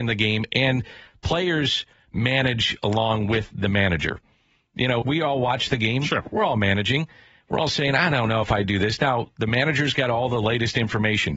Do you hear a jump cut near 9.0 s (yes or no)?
no